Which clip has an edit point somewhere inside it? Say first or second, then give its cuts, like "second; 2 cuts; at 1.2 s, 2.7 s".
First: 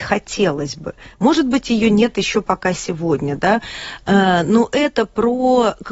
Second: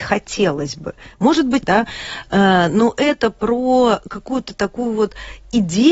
second; 1 cut; at 1.6 s